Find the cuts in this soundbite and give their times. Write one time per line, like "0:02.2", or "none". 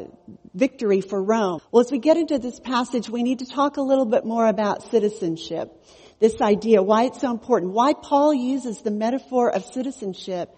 0:01.6